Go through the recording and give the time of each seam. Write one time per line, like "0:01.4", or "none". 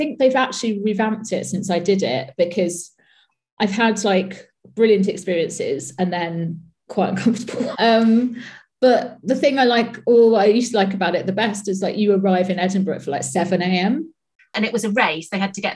0:07.7
0:14.4